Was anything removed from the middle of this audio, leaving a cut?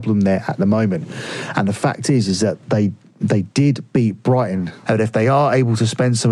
yes; 1 cut; at 4.8 s

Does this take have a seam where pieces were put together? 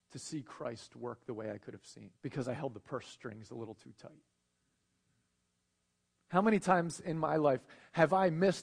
yes; 1 cut; at 2.2 s

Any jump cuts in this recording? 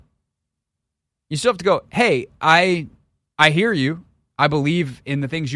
no; 0 cuts

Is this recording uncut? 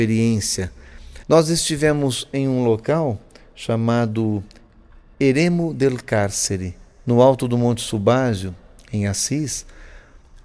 no; 1 cut; at 1.2 s

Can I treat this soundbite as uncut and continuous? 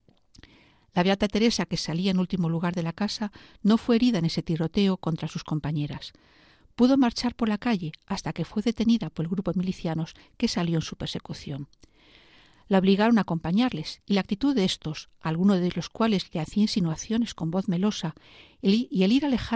yes; 0 cuts

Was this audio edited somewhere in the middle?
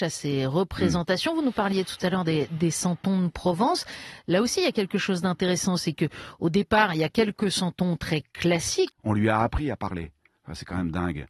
yes; 1 cut; at 8.9 s

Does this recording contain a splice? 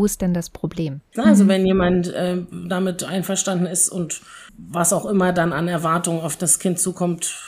yes; 2 cuts; at 1.2 s, 4.5 s

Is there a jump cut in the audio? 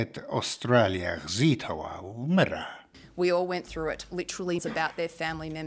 yes; 1 cut; at 4.6 s

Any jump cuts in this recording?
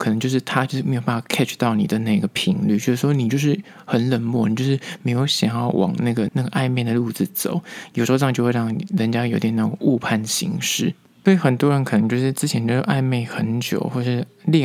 yes; 1 cut; at 6.3 s

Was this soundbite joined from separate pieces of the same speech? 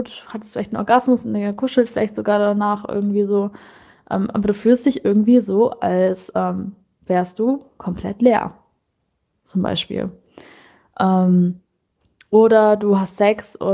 no; 0 cuts

